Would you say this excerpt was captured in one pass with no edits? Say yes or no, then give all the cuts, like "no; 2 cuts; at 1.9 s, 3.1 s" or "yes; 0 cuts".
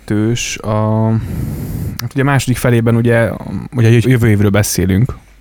no; 1 cut; at 4.0 s